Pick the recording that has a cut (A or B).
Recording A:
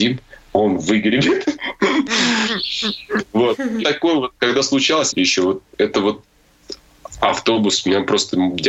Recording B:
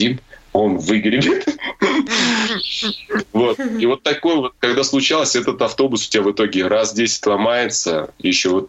A